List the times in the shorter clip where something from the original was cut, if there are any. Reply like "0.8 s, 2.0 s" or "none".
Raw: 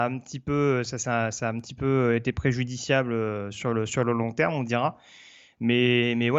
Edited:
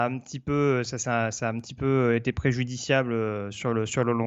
none